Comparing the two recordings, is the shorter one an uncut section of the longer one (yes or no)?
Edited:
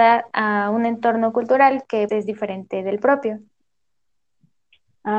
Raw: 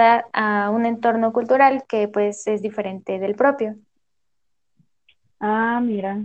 no